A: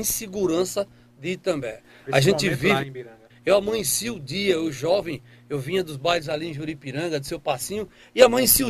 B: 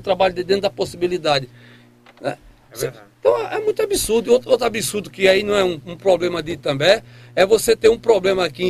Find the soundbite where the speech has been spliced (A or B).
A